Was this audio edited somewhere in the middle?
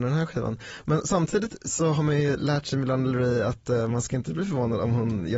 no; 0 cuts

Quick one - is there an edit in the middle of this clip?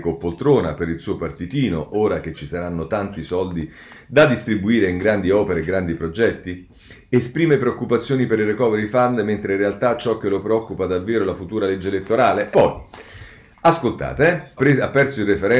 yes; 2 cuts; at 12.5 s, 14.6 s

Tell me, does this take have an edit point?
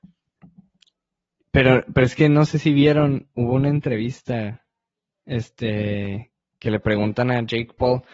no; 0 cuts

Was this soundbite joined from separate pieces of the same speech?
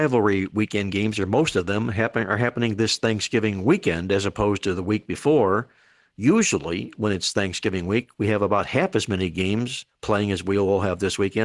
no; 0 cuts

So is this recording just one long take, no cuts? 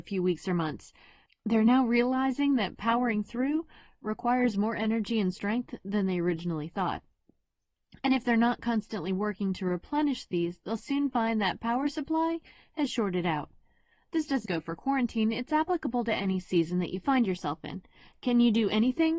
no; 1 cut; at 14.4 s

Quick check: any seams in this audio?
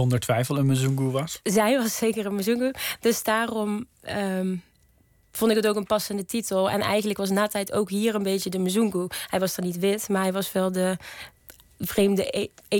no; 0 cuts

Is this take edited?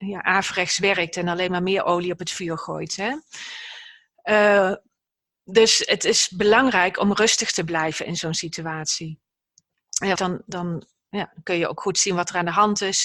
yes; 1 cut; at 10.1 s

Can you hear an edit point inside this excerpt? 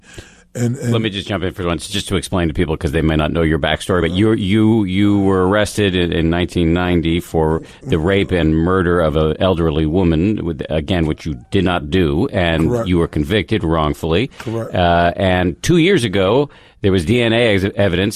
no; 0 cuts

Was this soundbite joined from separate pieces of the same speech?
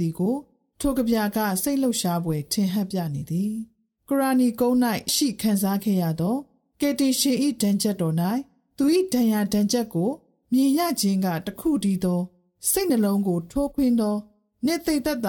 yes; 1 cut; at 5.1 s

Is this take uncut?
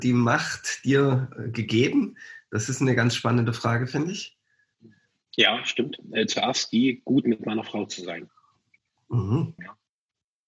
no; 1 cut; at 9.6 s

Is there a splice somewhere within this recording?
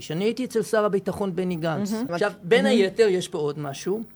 yes; 1 cut; at 2.1 s

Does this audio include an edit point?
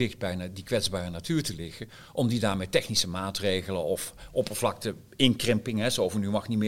no; 0 cuts

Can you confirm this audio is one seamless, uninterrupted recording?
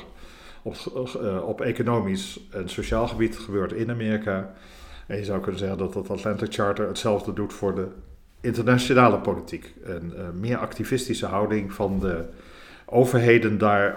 yes; 0 cuts

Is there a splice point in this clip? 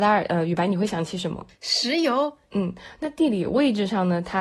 yes; 1 cut; at 2.5 s

